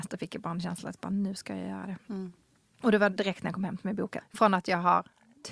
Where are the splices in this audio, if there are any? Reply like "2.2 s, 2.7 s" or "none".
4.2 s